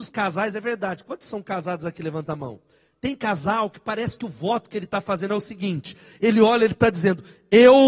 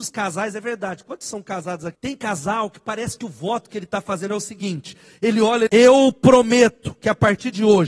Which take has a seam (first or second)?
second